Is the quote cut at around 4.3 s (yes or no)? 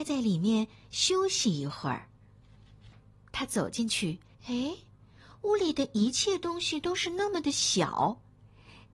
yes